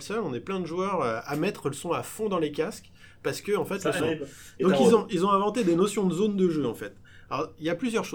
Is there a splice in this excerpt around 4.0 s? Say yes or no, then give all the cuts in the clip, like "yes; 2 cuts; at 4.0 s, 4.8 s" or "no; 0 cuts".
yes; 1 cut; at 4.0 s